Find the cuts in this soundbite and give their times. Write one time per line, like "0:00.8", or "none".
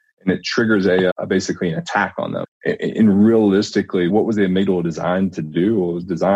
0:01.1
0:02.4
0:04.1